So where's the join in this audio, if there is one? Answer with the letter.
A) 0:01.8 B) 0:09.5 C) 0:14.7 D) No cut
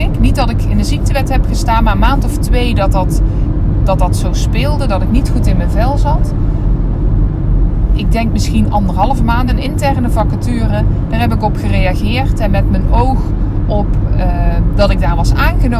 B